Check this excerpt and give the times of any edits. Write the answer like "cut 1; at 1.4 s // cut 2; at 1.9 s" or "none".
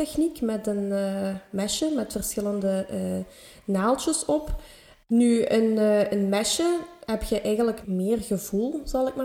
cut 1; at 5.1 s // cut 2; at 7.8 s